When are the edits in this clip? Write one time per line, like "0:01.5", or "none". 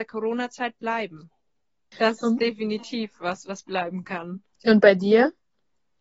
0:01.9
0:04.5